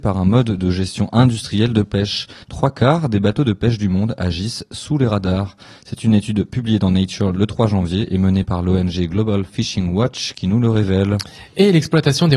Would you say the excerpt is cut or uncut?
cut